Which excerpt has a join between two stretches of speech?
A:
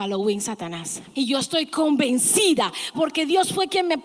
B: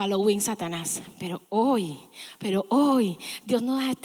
A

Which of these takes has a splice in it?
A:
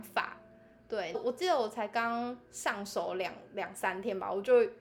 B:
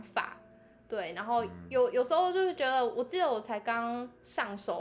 A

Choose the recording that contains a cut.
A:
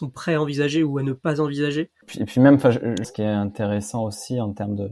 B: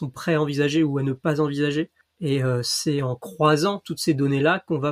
A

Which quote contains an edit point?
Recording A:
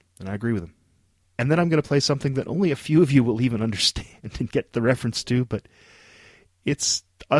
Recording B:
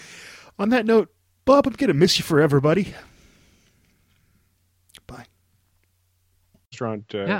A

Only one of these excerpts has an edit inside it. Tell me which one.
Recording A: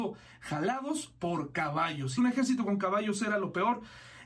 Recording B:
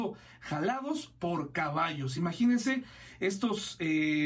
A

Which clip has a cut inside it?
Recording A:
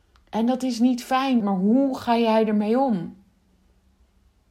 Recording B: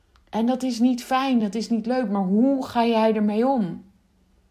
A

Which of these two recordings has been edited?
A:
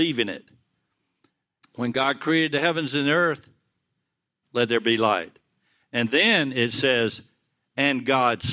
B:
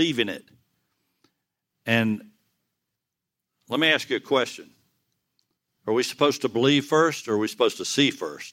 A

